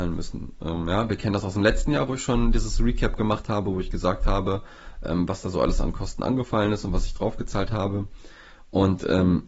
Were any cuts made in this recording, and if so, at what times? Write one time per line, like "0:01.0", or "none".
none